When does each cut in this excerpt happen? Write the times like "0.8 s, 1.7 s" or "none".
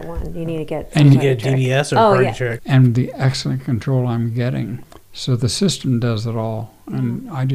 2.6 s